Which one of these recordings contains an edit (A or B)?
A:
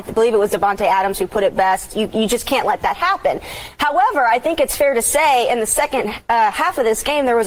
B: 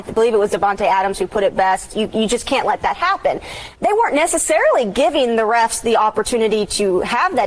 B